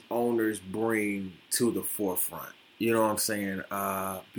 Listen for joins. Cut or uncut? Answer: uncut